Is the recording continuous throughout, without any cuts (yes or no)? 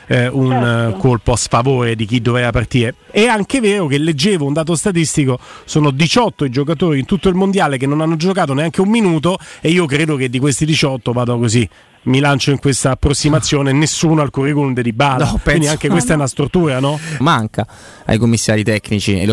no